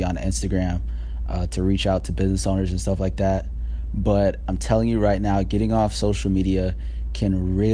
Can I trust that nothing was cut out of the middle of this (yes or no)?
yes